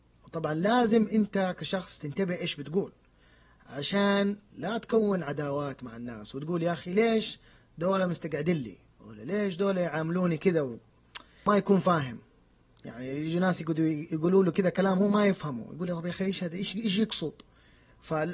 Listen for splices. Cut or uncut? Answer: uncut